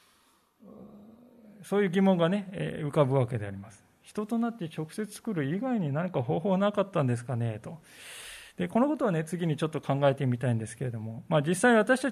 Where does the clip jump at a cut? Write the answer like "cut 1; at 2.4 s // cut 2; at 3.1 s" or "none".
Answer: none